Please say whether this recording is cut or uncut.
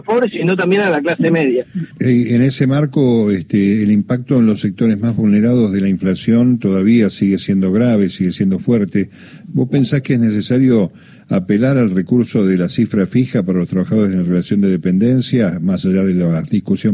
cut